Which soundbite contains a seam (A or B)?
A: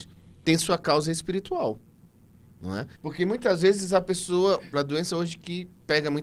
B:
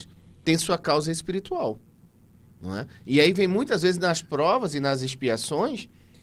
A